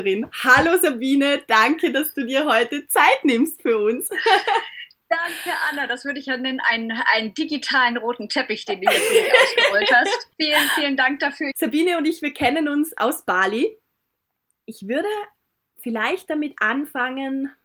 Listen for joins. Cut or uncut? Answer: cut